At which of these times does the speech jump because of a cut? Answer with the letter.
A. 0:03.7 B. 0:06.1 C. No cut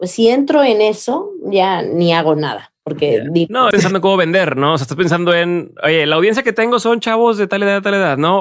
A